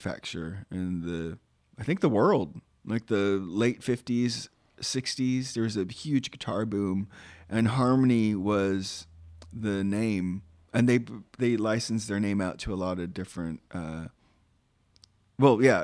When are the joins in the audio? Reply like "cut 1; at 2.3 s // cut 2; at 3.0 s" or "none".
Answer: none